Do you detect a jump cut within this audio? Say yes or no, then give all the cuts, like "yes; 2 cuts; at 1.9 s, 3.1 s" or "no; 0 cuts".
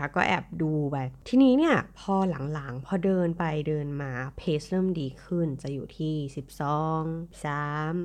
no; 0 cuts